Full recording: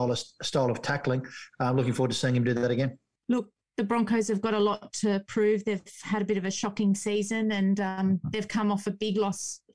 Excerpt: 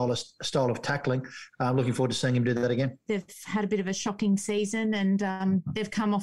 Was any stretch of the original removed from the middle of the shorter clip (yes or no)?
yes